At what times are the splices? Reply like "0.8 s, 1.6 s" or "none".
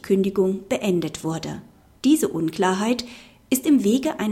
2.0 s